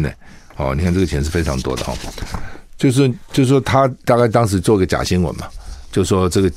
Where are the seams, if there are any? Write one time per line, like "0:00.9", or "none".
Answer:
none